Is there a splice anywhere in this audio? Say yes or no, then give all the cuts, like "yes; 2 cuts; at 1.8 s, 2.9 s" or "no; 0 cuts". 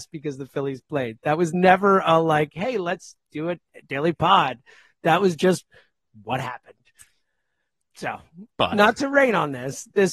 yes; 1 cut; at 8.5 s